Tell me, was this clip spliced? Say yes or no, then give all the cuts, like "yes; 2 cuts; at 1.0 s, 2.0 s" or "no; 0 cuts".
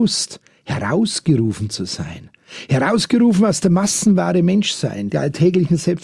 yes; 1 cut; at 5.1 s